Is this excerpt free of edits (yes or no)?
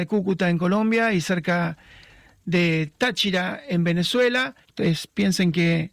no